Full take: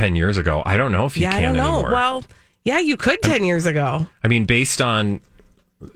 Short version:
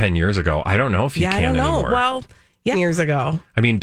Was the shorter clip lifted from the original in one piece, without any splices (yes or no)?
no